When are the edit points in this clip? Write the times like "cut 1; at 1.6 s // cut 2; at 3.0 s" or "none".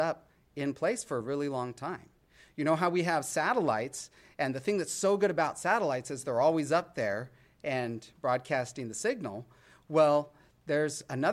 none